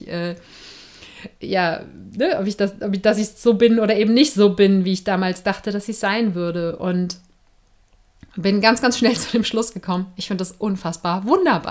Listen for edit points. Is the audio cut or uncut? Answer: uncut